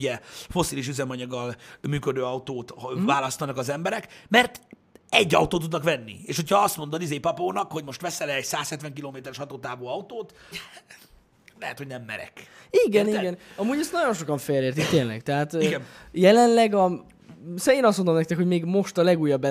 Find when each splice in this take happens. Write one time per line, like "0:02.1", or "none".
0:10.5